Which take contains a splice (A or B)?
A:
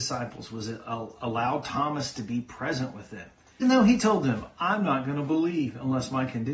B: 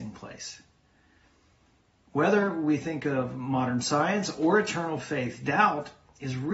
A